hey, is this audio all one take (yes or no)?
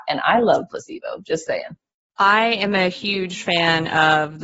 yes